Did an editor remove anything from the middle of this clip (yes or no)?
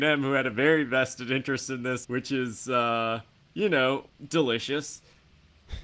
yes